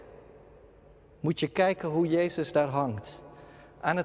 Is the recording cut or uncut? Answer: cut